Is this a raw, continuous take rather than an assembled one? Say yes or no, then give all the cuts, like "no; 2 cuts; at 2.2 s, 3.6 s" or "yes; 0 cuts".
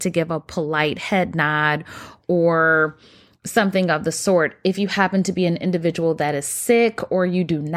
yes; 0 cuts